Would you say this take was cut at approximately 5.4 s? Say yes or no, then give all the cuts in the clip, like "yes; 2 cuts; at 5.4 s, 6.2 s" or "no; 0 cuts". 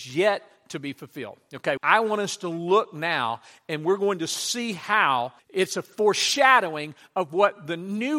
yes; 2 cuts; at 1.8 s, 5.4 s